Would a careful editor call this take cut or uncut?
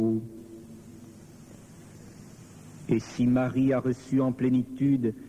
cut